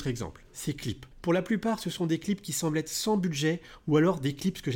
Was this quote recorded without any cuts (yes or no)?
no